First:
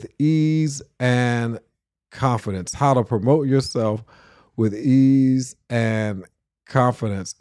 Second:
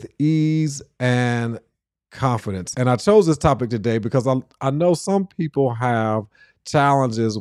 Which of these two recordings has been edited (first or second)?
second